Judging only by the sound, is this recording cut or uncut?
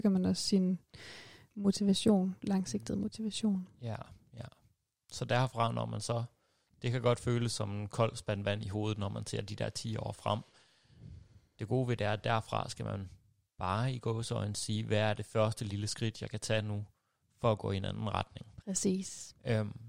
uncut